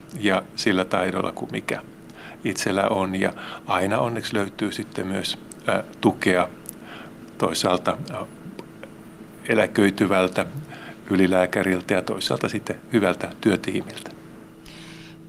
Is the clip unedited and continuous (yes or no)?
yes